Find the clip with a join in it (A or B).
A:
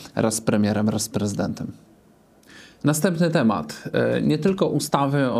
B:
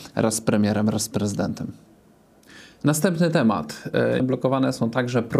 B